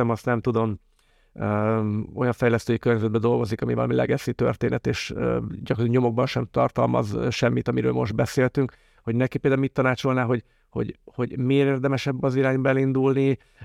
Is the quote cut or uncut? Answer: uncut